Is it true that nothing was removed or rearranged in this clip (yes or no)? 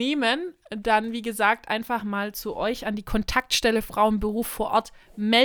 yes